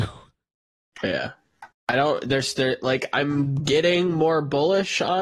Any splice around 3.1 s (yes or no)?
no